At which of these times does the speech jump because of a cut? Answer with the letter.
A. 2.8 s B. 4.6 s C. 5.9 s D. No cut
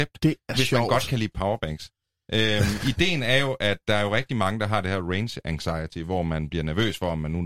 D